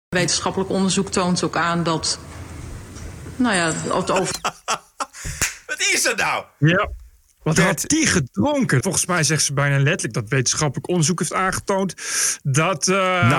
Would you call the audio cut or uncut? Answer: cut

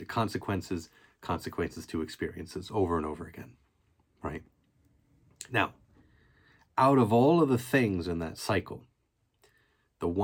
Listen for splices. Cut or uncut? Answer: uncut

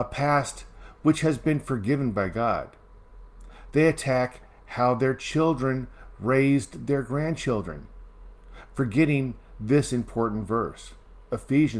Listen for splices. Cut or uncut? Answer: uncut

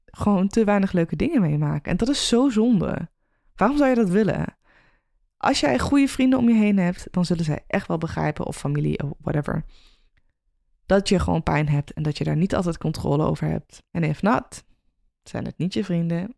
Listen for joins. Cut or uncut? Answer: cut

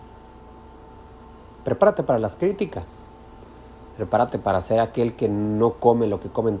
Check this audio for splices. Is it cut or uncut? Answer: cut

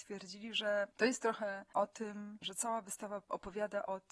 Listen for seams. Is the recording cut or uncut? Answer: cut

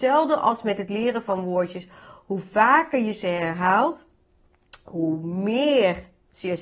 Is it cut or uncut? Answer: uncut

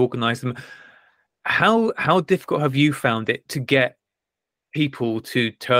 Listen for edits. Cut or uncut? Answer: uncut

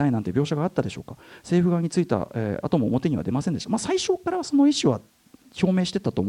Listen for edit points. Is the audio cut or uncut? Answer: uncut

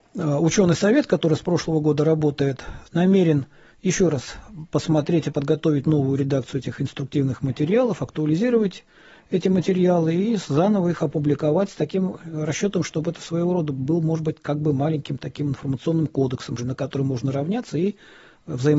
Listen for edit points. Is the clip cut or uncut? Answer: cut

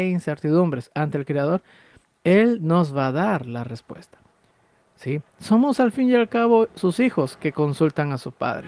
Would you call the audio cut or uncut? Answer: uncut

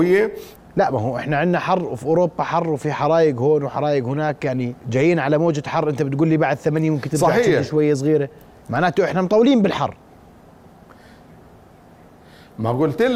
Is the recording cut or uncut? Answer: cut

